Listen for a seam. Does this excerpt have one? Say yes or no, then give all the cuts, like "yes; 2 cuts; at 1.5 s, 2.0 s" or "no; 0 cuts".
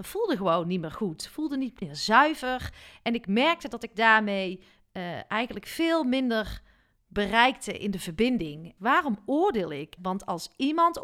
yes; 2 cuts; at 8.8 s, 10.0 s